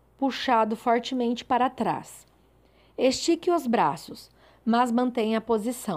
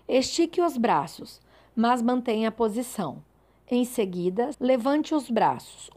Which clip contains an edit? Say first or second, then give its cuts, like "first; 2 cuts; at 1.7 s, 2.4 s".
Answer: second; 1 cut; at 4.5 s